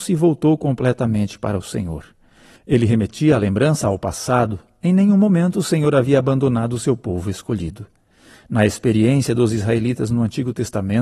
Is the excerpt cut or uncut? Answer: cut